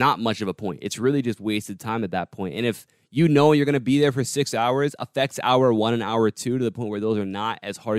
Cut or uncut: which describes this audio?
uncut